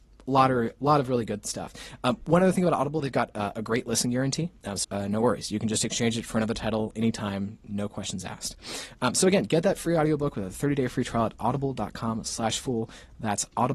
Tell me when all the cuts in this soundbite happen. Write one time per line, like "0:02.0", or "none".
0:04.8